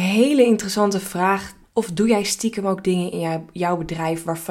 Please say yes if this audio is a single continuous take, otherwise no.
no